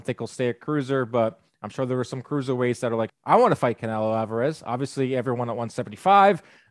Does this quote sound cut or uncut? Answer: cut